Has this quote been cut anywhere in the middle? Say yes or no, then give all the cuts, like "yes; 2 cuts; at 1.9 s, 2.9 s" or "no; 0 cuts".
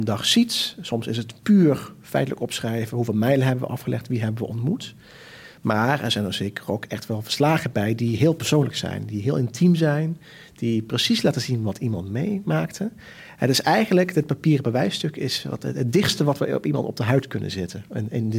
no; 0 cuts